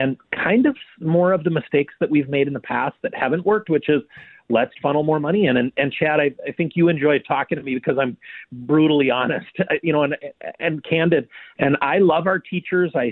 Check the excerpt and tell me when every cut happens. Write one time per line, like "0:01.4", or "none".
0:04.7
0:11.6